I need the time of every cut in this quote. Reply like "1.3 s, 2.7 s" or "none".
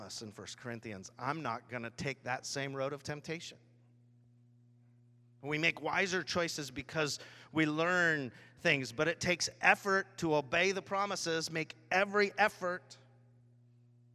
none